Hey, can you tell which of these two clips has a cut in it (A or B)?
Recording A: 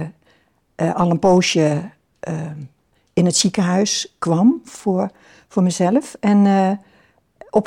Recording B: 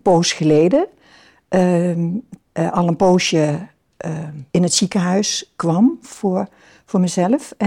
B